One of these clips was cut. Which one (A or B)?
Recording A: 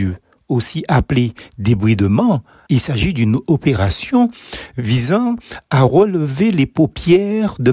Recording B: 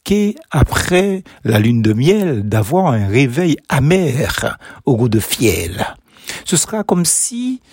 A